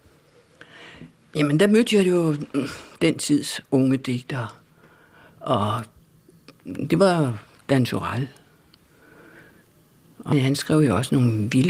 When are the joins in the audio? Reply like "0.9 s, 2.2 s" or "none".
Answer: 10.3 s